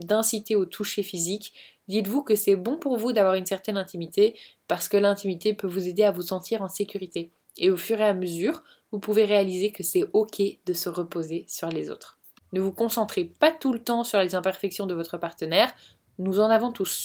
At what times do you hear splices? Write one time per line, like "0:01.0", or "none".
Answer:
0:12.4